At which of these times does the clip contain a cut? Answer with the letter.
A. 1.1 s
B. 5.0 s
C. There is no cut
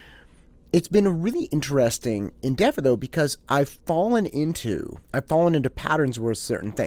B